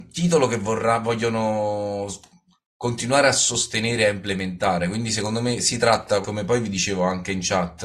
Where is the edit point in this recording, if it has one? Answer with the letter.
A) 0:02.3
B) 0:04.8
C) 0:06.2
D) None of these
C